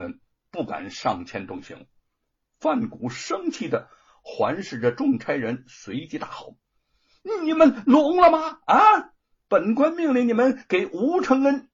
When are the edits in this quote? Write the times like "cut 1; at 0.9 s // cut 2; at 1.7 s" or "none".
none